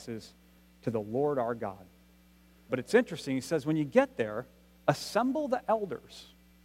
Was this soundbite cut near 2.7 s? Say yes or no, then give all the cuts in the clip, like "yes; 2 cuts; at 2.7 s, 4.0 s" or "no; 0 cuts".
yes; 1 cut; at 2.7 s